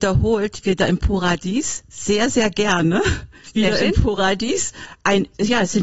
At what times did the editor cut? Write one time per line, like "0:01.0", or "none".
none